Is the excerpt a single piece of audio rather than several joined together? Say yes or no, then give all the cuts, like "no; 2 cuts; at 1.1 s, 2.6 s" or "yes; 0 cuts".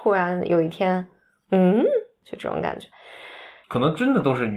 no; 1 cut; at 3.6 s